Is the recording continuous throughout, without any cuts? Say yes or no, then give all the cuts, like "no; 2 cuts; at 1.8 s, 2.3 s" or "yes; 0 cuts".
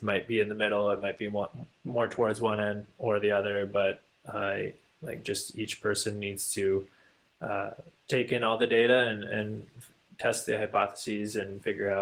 yes; 0 cuts